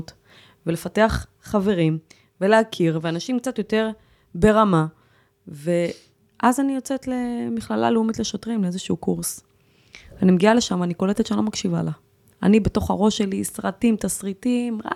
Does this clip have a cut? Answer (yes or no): no